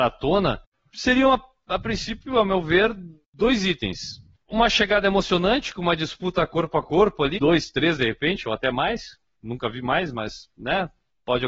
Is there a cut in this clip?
yes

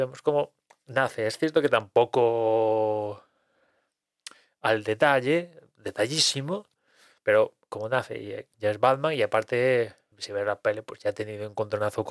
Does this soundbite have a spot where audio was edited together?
yes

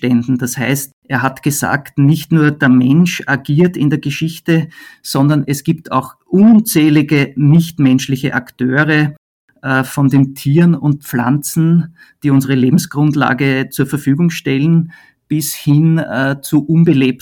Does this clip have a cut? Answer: no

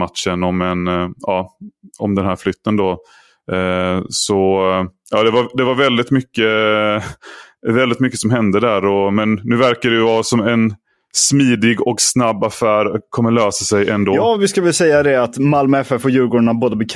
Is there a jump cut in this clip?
no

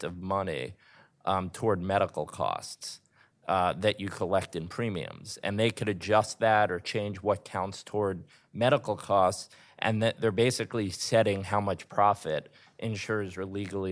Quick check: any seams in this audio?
no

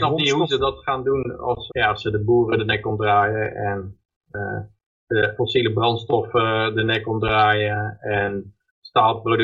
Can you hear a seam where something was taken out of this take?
yes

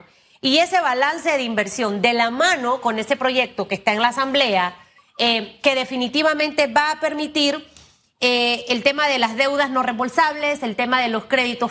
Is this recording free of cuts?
yes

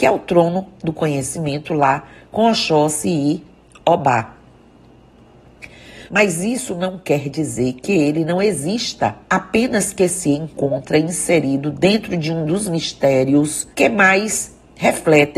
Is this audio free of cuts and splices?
no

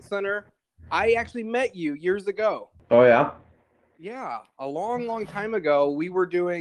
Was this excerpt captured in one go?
yes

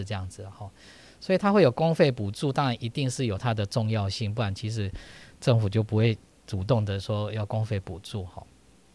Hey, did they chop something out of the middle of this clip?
no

